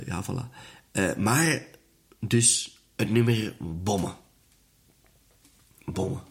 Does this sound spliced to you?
no; 0 cuts

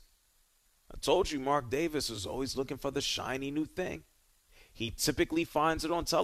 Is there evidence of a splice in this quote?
no; 0 cuts

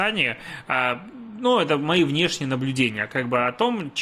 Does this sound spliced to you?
no; 0 cuts

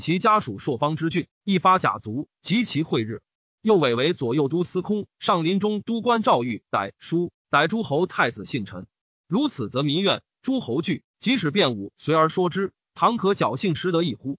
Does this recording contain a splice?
no; 0 cuts

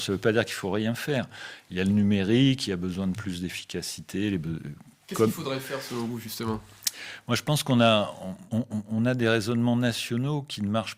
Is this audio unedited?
no; 1 cut; at 8.5 s

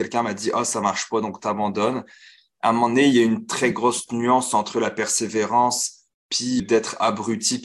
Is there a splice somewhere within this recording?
yes; 1 cut; at 6.6 s

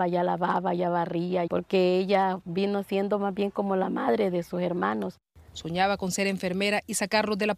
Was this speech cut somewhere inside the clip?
yes; 2 cuts; at 1.5 s, 5.5 s

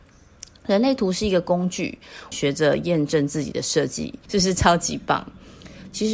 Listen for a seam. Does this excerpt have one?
yes; 2 cuts; at 2.3 s, 4.3 s

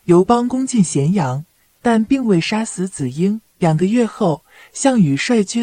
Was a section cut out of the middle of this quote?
yes; 2 cuts; at 1.7 s, 3.5 s

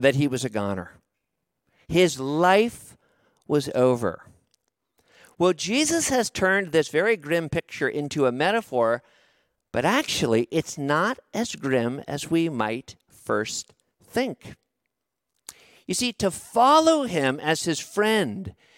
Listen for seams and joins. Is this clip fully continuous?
yes; 0 cuts

